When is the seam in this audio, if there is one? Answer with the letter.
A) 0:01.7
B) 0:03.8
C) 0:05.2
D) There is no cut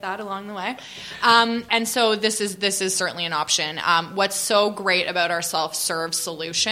A